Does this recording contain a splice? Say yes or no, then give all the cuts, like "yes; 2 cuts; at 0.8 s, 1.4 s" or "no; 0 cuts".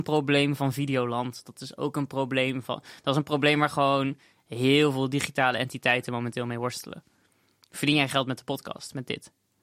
no; 0 cuts